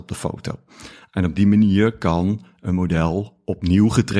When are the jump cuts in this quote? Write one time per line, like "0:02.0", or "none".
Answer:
none

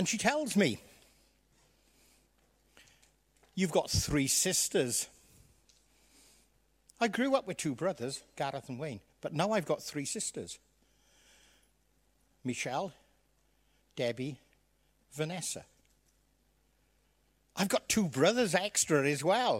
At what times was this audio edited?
none

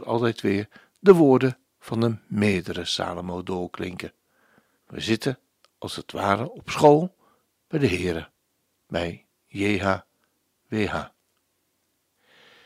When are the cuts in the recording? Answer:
0:04.8

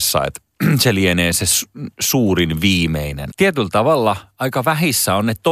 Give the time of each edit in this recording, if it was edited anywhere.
0:03.3

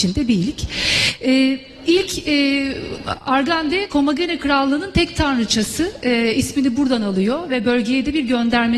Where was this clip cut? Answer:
none

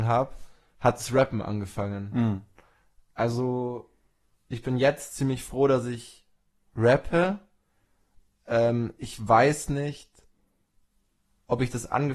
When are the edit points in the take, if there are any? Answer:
none

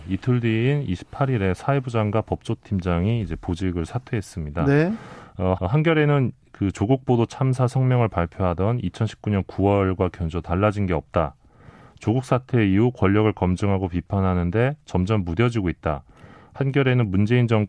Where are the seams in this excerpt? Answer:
0:05.6

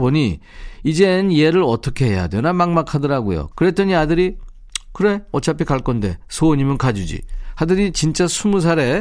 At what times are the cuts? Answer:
0:03.5

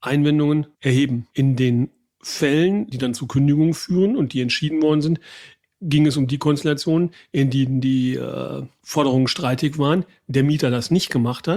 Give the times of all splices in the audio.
0:02.9

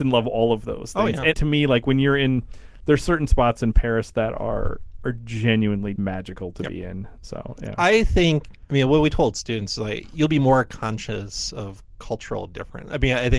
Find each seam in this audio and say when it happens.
0:01.3
0:06.0

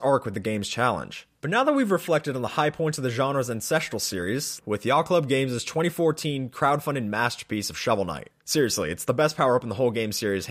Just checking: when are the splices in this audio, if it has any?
0:01.4
0:04.6
0:08.3

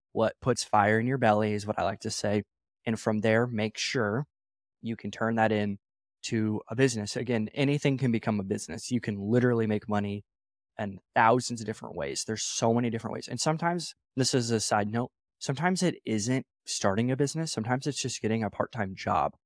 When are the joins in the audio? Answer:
none

